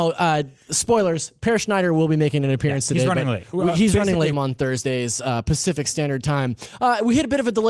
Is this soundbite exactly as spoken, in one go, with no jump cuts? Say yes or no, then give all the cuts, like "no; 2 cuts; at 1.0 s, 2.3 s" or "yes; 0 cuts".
no; 1 cut; at 4.3 s